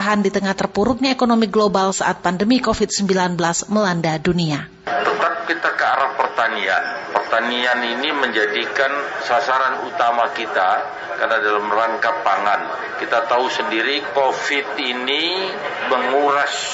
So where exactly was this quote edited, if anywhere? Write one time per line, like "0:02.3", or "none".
none

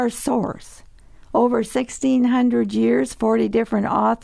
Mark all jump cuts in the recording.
none

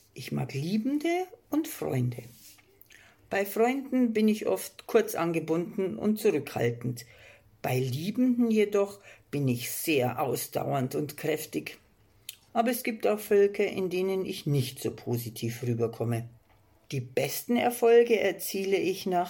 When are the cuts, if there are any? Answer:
0:12.5
0:16.8

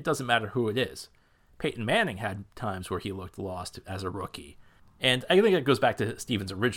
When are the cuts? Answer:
0:04.8

